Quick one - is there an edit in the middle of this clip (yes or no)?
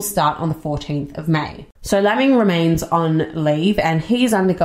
yes